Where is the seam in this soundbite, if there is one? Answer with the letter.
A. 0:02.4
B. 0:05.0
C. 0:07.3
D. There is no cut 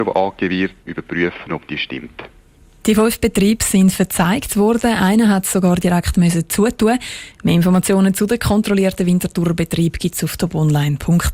C